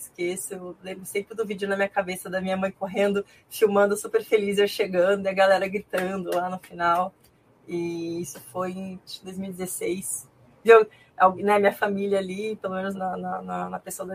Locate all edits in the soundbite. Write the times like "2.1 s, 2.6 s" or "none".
10.6 s, 12.9 s